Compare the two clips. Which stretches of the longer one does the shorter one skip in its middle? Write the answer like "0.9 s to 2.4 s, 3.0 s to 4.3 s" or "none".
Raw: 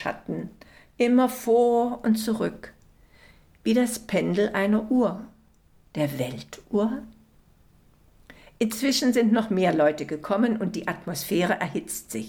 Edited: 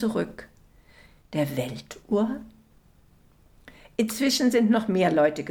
3.5 s to 5.8 s